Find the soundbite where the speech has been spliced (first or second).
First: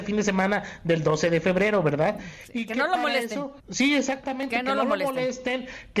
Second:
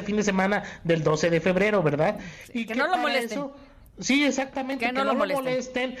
first